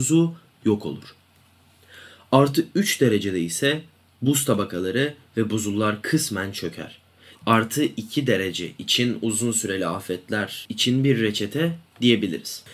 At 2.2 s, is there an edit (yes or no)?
no